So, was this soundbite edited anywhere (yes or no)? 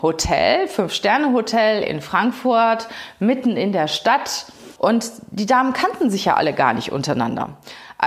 yes